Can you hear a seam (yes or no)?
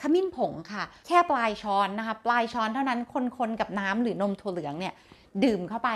no